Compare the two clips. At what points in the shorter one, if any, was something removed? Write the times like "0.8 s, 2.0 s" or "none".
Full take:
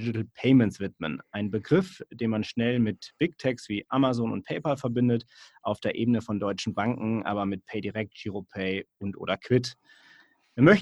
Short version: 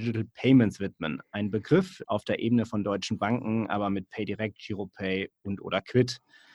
2.0 s